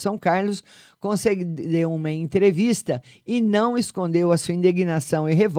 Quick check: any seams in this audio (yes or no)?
no